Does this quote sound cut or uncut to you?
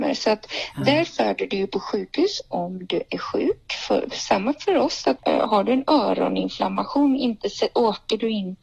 cut